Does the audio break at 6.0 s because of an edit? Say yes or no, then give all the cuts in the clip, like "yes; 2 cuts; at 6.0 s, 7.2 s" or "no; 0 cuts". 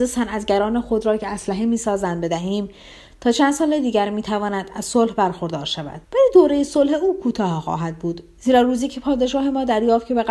yes; 1 cut; at 6.0 s